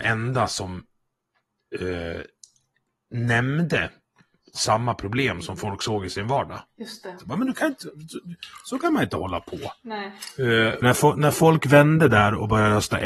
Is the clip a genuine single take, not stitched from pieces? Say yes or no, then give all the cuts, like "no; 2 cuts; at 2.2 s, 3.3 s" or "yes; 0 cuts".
no; 2 cuts; at 7.2 s, 10.8 s